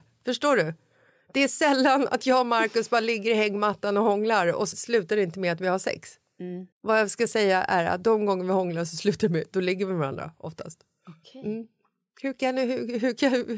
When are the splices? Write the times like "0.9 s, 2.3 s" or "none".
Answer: 4.7 s, 6.7 s